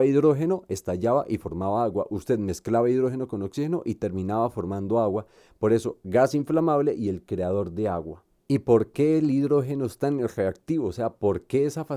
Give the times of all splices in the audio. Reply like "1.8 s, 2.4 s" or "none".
none

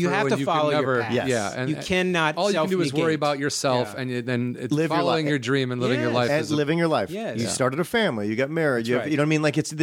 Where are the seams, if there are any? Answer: none

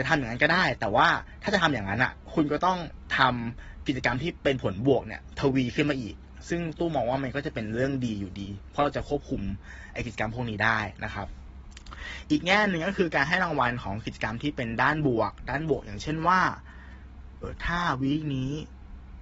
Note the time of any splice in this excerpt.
17.4 s

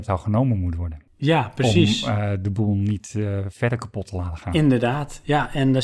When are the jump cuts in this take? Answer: none

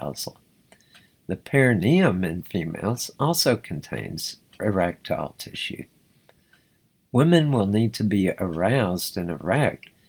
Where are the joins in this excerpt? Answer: none

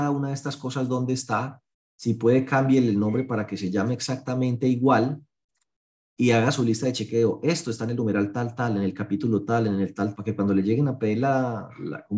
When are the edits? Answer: 10.1 s

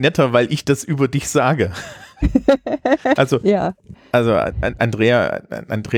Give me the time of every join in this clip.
3.2 s

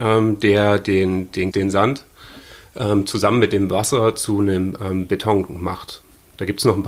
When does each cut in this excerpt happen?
1.5 s

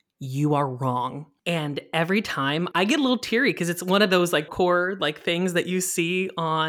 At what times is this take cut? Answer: 2.7 s, 4.5 s

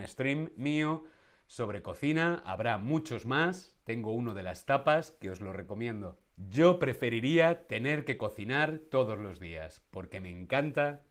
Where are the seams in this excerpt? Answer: 6.3 s

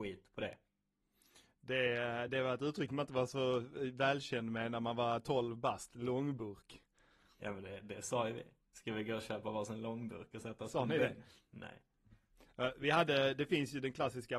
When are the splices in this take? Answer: none

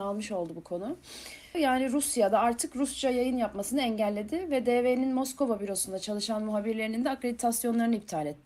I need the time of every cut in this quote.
1.5 s

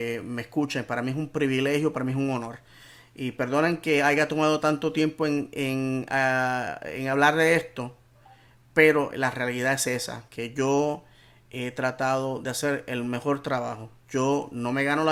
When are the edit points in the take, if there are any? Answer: none

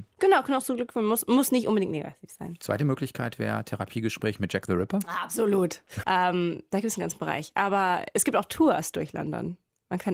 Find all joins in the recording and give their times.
6.0 s

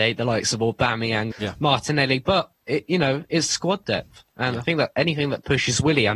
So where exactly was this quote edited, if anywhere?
1.3 s

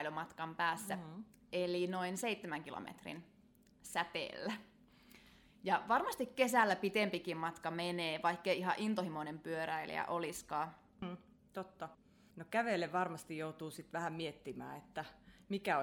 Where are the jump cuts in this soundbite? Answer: none

